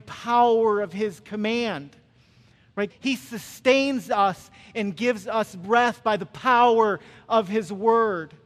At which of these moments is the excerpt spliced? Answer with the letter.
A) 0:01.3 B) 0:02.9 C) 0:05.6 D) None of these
B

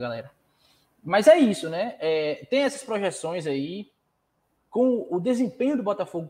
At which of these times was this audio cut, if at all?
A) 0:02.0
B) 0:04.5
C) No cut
B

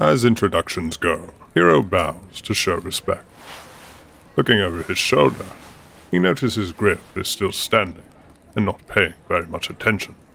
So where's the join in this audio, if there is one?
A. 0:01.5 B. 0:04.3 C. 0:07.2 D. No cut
A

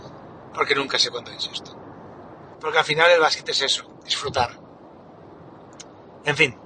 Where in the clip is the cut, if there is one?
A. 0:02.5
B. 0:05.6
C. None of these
A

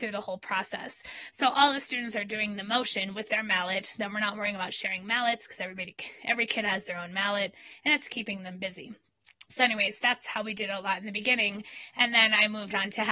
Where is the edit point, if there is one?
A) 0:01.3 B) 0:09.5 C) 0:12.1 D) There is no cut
A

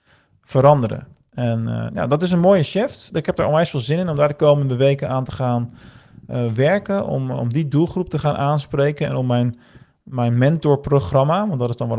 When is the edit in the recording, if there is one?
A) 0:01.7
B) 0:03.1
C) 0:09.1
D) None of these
D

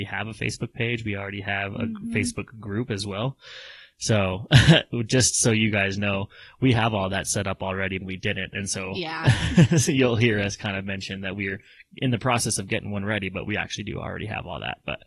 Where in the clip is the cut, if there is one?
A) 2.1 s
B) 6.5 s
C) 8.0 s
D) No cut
C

